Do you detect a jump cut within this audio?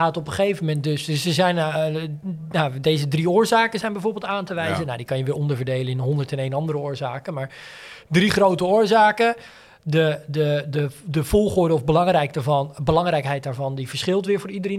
no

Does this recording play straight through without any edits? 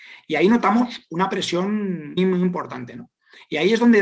no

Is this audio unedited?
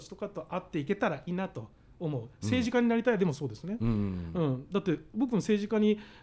no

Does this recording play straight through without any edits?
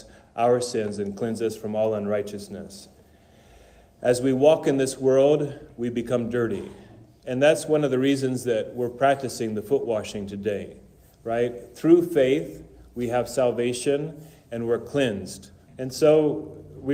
no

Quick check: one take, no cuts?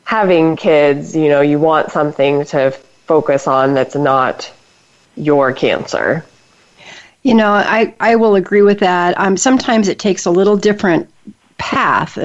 yes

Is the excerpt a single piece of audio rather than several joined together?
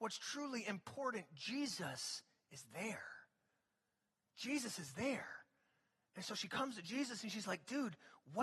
yes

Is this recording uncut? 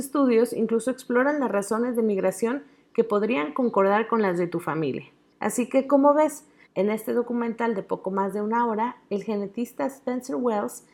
no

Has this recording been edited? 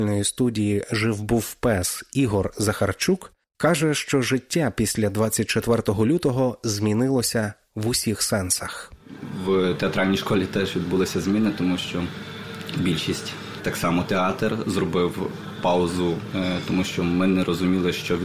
yes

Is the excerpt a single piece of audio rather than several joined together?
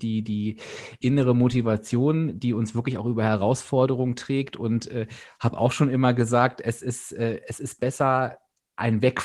no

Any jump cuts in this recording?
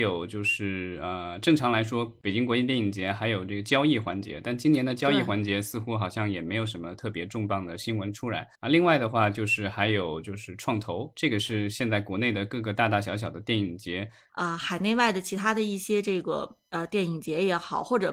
yes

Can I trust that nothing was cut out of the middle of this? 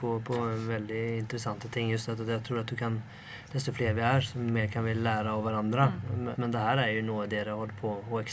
no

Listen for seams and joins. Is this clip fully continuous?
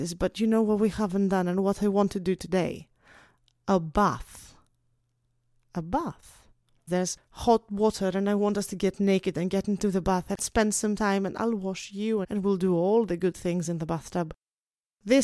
no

